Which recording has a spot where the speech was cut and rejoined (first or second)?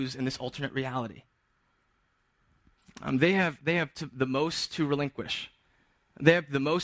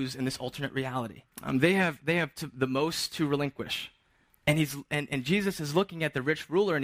second